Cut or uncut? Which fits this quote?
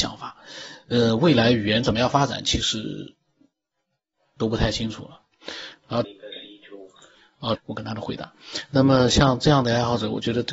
cut